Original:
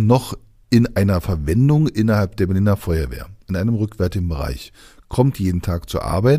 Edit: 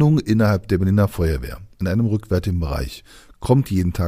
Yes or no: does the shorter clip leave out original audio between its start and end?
no